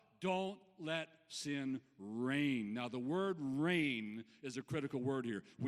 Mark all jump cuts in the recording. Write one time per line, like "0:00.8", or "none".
none